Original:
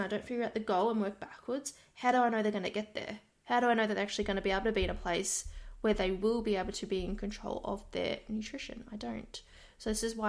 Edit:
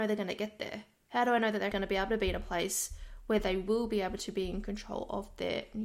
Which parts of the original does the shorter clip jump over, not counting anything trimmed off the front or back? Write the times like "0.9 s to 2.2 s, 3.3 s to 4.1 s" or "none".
4.1 s to 4.3 s